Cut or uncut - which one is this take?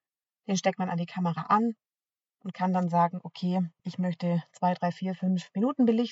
cut